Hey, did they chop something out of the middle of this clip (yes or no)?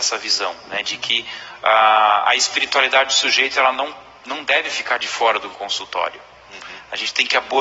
no